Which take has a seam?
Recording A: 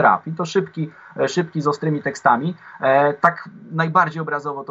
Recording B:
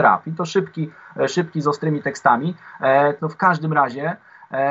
B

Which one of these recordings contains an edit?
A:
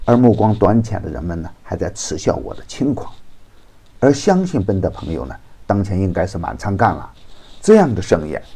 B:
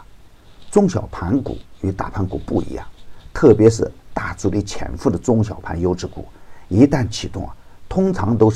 A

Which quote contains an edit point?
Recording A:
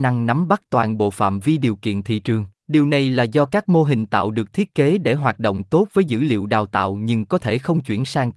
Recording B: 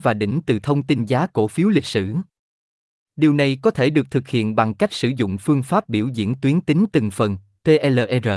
A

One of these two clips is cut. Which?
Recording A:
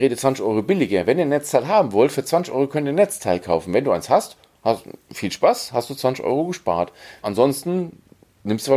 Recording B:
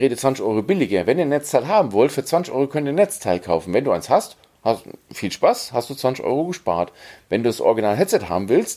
A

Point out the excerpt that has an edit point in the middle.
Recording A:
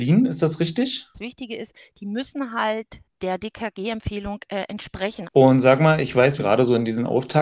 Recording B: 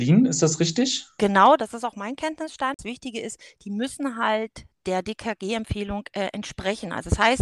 A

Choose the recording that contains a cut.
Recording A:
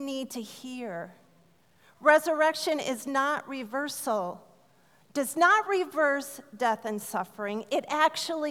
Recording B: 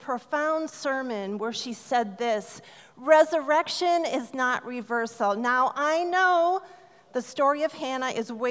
A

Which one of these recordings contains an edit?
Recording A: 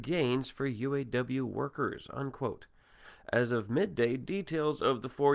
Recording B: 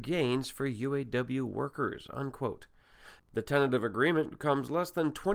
B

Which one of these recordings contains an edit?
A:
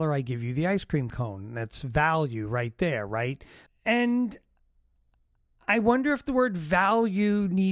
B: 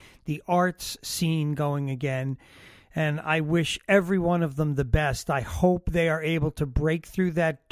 A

